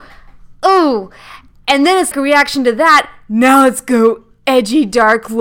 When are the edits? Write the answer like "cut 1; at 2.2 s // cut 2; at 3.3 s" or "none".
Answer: cut 1; at 2.1 s